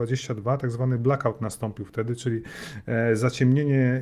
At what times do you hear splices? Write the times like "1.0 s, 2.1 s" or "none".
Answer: none

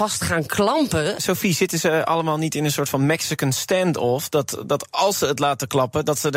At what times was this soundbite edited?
1.2 s

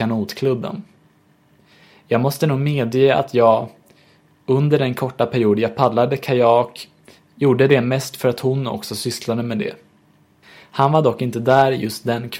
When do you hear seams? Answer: 10.4 s

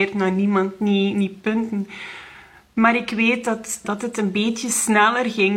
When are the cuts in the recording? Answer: 1.1 s, 3.8 s

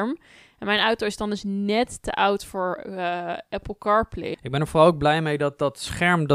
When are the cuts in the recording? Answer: 4.3 s

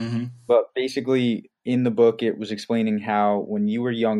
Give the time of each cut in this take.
none

